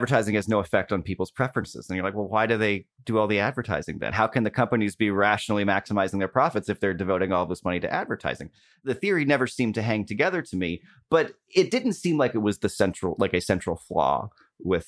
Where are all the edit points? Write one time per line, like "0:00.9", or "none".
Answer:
none